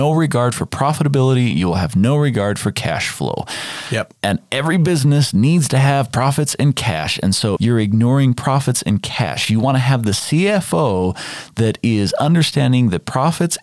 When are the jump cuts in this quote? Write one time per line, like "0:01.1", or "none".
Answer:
0:07.6